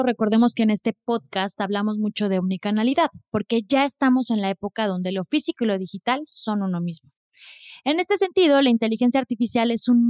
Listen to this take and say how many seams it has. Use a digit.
0